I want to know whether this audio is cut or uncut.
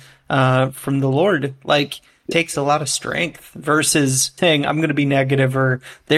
cut